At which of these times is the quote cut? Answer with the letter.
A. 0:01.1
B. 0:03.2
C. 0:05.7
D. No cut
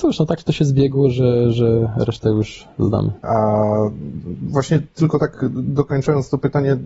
B